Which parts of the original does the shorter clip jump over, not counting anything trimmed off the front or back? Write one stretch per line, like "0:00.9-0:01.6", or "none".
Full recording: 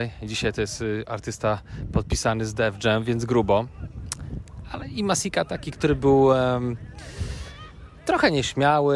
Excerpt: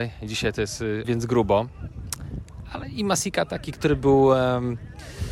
0:01.0-0:03.0